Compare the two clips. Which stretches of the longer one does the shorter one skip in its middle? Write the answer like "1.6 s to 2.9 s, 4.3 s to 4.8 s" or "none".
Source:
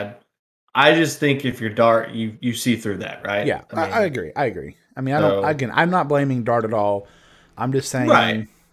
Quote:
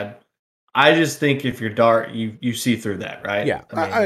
none